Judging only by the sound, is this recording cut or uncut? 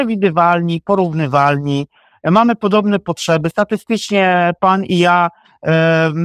uncut